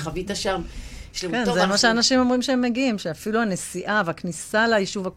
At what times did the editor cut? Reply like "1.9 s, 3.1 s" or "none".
1.1 s